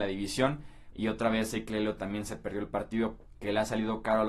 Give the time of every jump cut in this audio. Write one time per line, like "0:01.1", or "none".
0:00.9
0:03.3